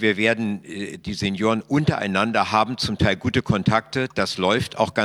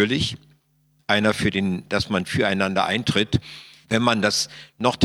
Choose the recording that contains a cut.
second; 2 cuts; at 1.0 s, 3.8 s

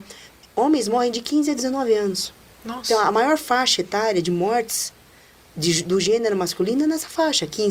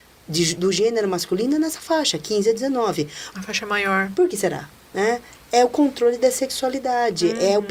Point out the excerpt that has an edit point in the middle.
second; 1 cut; at 3.3 s

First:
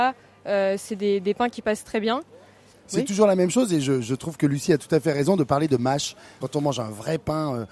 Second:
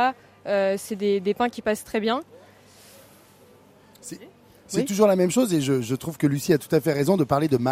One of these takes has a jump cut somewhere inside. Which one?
first; 2 cuts; at 2.7 s, 6.4 s

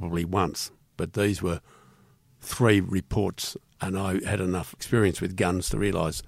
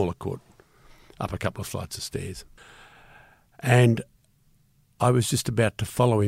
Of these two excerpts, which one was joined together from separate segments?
first; 1 cut; at 0.9 s

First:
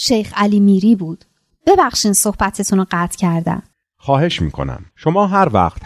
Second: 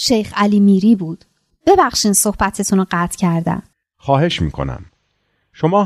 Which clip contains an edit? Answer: first; 1 cut; at 4.9 s

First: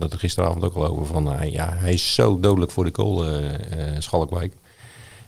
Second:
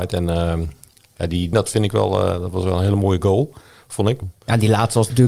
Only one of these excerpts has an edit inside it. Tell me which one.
second; 2 cuts; at 1.5 s, 4.2 s

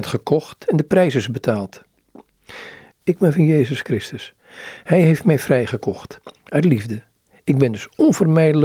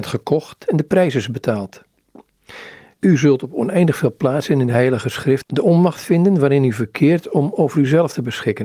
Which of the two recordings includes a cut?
first; 1 cut; at 2.9 s

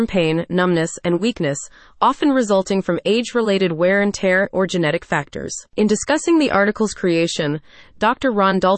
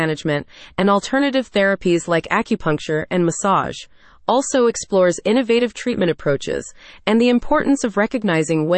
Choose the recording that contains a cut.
first; 2 cuts; at 4.5 s, 5.7 s

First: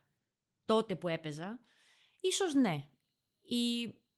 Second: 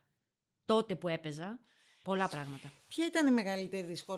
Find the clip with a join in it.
second; 1 cut; at 2.0 s

